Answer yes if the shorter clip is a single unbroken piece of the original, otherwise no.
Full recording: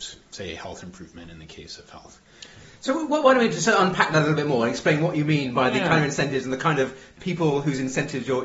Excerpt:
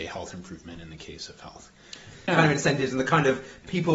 no